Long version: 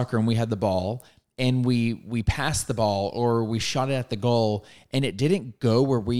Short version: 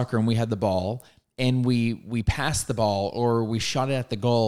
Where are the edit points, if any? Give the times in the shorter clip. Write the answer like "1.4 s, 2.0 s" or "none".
none